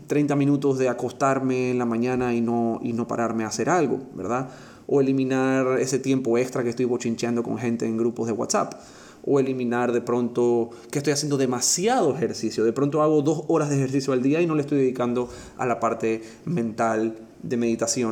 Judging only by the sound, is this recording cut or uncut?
uncut